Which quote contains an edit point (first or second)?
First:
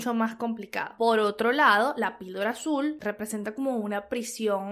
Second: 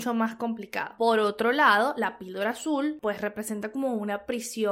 first